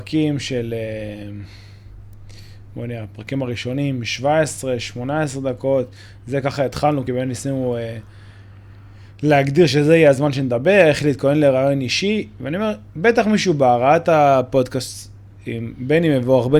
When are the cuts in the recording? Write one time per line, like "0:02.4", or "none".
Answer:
none